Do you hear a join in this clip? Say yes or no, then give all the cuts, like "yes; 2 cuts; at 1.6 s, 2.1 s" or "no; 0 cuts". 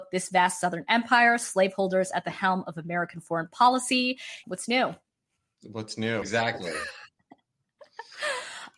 yes; 2 cuts; at 4.4 s, 6.2 s